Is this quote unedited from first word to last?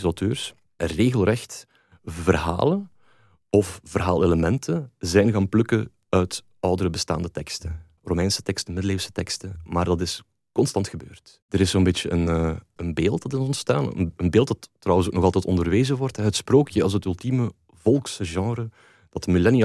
yes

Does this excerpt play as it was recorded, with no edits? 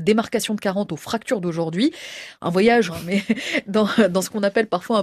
no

